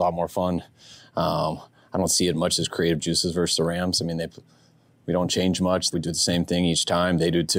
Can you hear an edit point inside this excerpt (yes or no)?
yes